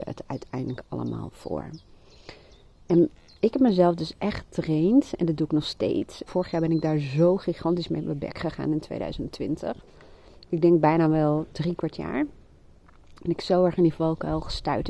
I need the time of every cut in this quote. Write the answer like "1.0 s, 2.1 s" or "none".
6.3 s